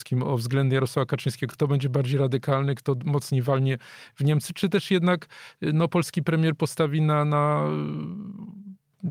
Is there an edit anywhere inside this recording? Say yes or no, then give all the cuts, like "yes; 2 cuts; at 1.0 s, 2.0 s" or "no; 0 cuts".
no; 0 cuts